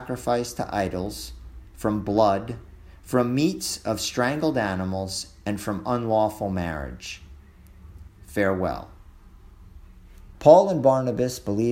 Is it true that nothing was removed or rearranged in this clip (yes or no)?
no